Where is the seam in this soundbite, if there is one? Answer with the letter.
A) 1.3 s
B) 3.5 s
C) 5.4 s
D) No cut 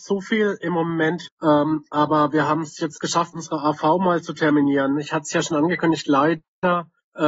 A